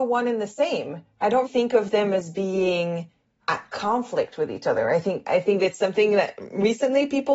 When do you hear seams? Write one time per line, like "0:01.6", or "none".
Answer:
0:01.5